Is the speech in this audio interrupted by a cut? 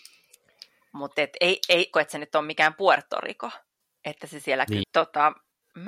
yes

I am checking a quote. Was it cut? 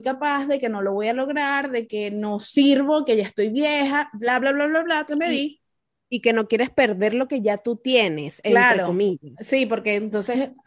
yes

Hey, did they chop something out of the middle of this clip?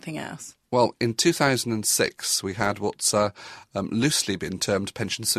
no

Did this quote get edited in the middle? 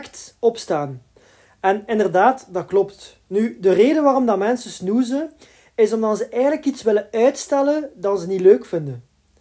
no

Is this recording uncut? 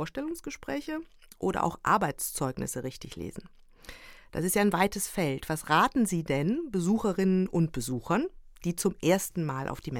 yes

